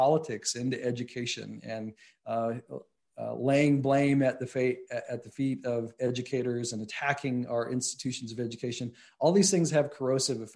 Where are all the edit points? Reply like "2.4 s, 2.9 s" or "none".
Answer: none